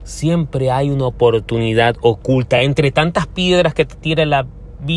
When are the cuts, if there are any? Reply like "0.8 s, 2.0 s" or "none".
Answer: none